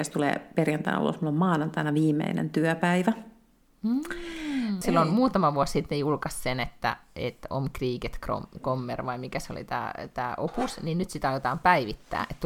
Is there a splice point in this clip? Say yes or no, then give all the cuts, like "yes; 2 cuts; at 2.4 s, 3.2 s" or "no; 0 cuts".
yes; 1 cut; at 4.8 s